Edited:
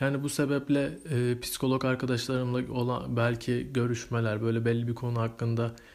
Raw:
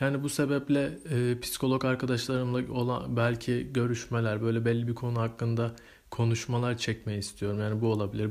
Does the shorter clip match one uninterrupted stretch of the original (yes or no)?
yes